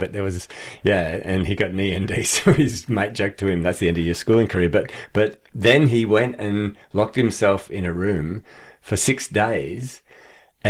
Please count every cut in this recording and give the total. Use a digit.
0